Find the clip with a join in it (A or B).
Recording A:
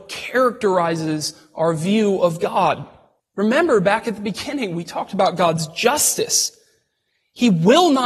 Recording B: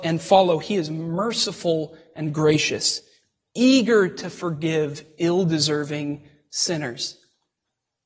A